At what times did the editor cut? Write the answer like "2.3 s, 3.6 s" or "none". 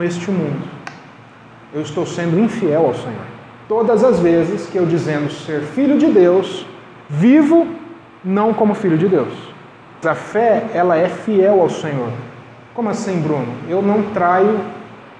3.6 s, 10.0 s